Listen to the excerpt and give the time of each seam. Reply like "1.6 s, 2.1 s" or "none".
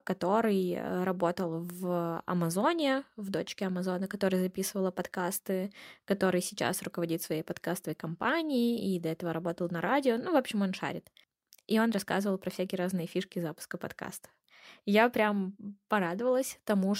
none